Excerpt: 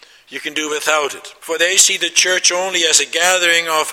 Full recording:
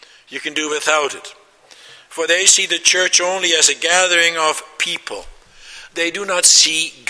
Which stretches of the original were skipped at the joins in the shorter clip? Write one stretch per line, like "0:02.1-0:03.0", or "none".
0:01.4-0:02.1